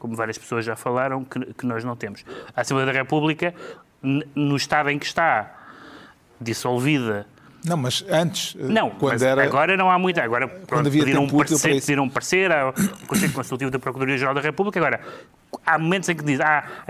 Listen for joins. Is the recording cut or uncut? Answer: uncut